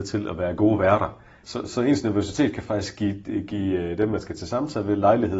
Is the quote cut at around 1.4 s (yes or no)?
yes